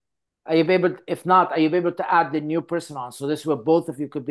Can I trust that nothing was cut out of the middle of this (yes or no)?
yes